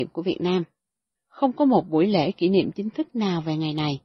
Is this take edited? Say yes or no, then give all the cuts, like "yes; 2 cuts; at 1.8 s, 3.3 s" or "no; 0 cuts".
yes; 1 cut; at 1.2 s